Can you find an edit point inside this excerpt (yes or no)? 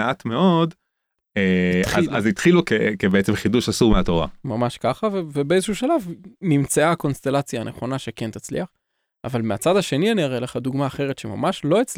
no